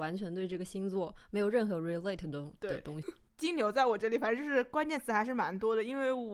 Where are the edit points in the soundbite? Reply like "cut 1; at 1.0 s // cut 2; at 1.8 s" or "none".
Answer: cut 1; at 3.0 s